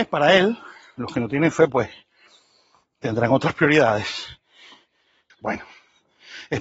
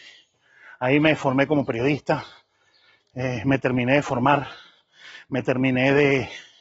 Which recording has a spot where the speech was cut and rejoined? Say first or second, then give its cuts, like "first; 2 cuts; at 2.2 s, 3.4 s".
first; 1 cut; at 5.3 s